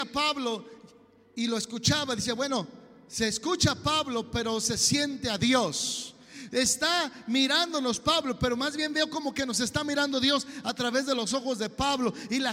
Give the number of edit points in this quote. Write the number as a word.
zero